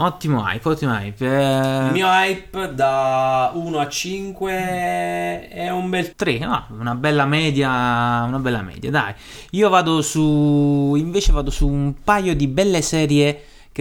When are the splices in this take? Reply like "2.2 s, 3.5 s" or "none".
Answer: 6.1 s